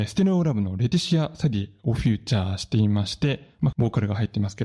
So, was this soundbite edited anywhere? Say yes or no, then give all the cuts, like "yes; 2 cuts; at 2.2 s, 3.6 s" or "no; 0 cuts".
yes; 1 cut; at 3.7 s